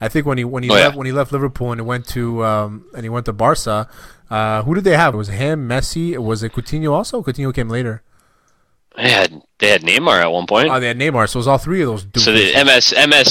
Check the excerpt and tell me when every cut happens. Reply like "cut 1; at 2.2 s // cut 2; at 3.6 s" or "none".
cut 1; at 5.1 s